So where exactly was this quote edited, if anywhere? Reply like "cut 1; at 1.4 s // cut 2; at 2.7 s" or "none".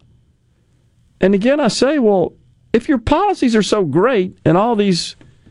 none

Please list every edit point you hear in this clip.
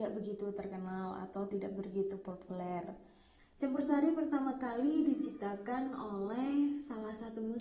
cut 1; at 3.4 s

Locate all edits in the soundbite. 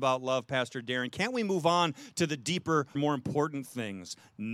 cut 1; at 3.0 s

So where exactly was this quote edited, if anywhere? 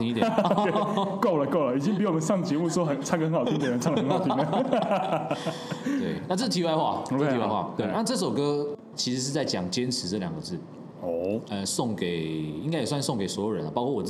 cut 1; at 11.4 s

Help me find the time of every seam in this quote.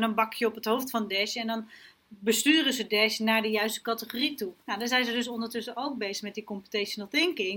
cut 1; at 4.6 s

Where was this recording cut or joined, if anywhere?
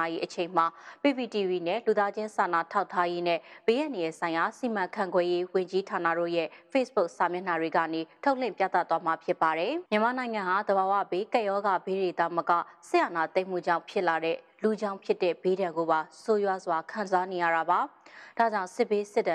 cut 1; at 9.9 s

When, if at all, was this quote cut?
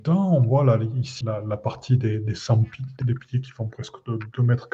cut 1; at 1.2 s // cut 2; at 3.0 s

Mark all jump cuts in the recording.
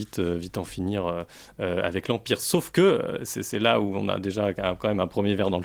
none

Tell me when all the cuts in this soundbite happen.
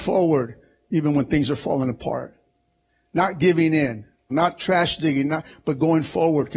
cut 1; at 4.3 s

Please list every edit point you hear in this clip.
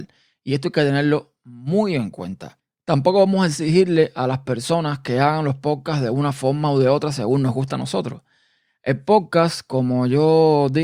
none

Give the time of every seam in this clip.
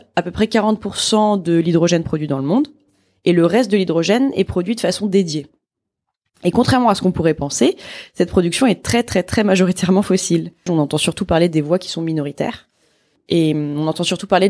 cut 1; at 10.7 s

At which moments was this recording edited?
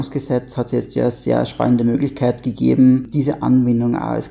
none

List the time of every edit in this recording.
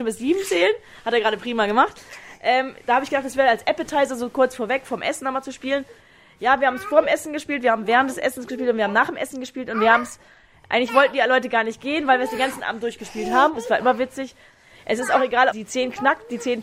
cut 1; at 13.5 s // cut 2; at 15.5 s

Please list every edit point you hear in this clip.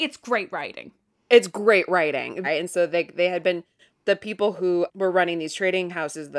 cut 1; at 2.4 s

